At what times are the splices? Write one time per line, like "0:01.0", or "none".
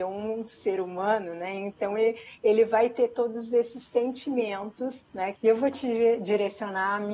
0:05.3